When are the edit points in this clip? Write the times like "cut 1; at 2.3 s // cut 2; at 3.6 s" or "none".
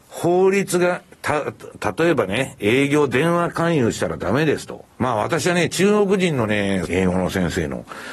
cut 1; at 5.0 s // cut 2; at 6.9 s